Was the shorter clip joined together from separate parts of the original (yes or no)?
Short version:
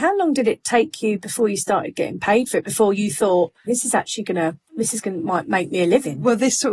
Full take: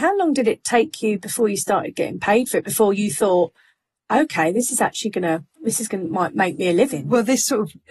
yes